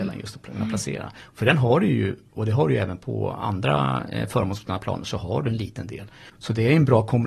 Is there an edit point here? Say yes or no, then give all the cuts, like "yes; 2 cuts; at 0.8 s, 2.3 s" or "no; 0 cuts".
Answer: yes; 1 cut; at 6.3 s